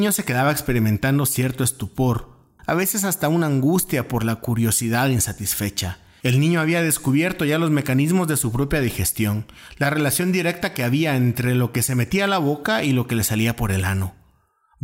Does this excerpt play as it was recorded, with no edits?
no; 2 cuts; at 2.6 s, 6.2 s

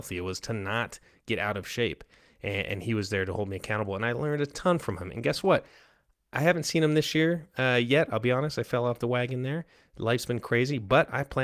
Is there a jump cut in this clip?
no; 0 cuts

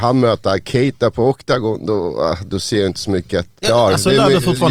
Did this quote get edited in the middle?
yes; 1 cut; at 3.6 s

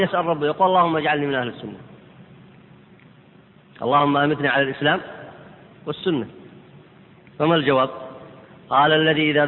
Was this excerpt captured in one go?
yes; 0 cuts

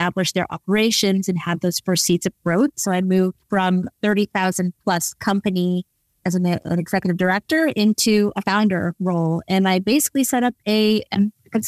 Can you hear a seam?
yes; 1 cut; at 2.7 s

